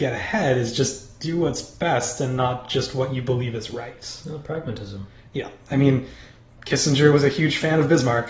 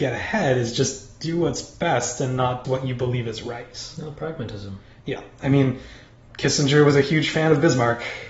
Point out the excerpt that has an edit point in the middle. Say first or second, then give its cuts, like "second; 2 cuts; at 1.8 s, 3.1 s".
second; 1 cut; at 2.6 s